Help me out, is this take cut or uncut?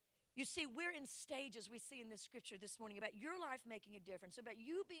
uncut